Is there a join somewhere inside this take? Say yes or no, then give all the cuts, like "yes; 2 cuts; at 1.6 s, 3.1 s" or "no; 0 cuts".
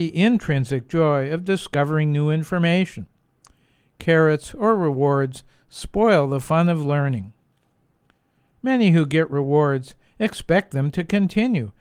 no; 0 cuts